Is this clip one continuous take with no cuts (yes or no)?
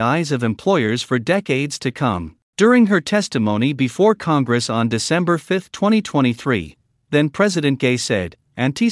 no